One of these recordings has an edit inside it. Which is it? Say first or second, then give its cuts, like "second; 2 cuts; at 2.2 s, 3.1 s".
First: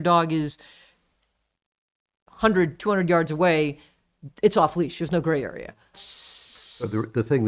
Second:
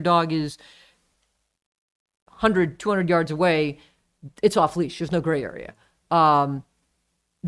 first; 1 cut; at 5.9 s